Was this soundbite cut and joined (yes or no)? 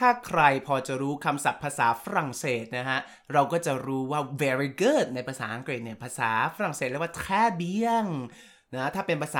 no